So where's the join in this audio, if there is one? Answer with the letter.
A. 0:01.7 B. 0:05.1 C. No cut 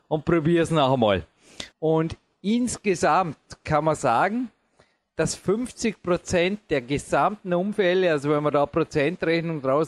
A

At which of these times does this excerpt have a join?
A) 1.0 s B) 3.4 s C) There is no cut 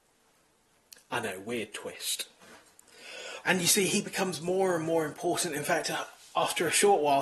B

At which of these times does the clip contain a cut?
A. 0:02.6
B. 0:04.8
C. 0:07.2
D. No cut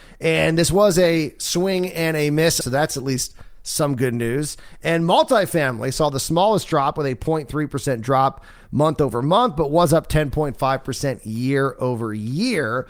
A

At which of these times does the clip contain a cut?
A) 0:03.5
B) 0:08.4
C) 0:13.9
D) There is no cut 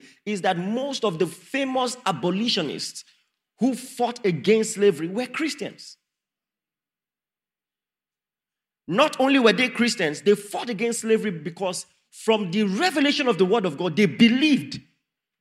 D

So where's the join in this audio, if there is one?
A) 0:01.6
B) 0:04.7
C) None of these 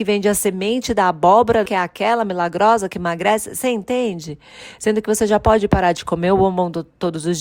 A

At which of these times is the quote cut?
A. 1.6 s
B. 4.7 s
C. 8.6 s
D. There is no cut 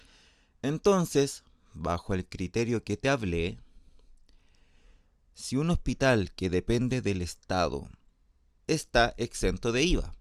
C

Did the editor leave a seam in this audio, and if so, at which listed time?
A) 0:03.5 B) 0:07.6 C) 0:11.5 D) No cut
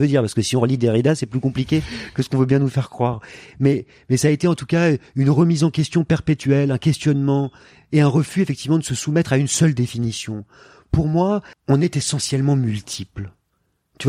C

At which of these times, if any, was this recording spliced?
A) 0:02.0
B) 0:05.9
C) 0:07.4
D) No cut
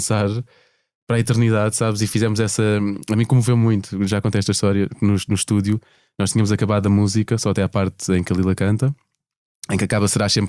D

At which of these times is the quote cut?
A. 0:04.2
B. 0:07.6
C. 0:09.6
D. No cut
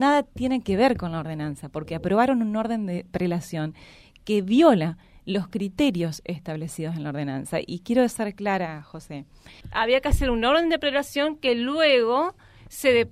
C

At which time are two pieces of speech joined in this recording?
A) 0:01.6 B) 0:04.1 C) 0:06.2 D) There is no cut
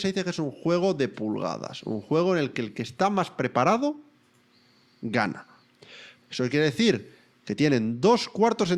C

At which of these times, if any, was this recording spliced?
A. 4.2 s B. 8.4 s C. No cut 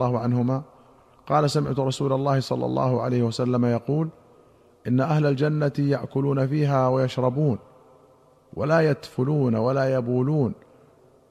C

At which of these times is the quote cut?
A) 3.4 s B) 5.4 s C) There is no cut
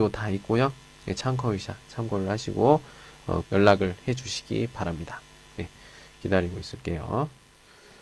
A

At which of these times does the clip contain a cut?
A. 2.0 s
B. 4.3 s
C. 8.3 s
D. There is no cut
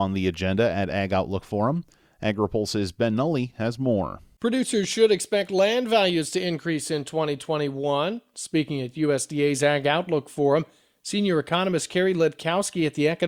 D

